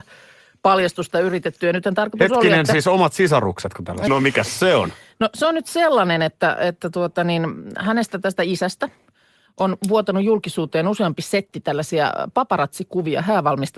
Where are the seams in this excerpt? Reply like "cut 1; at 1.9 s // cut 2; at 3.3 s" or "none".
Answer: cut 1; at 4.1 s